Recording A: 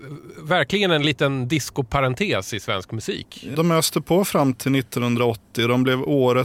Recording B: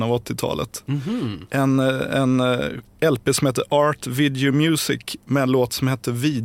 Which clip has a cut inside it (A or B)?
A